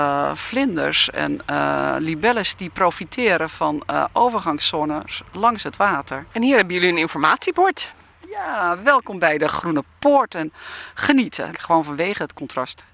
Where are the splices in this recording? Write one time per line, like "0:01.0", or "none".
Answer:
0:11.5